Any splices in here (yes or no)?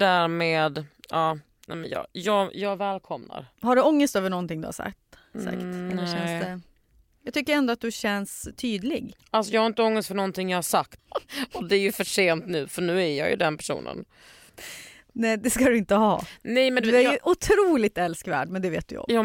yes